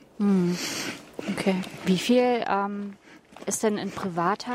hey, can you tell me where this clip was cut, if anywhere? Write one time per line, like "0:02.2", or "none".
0:01.8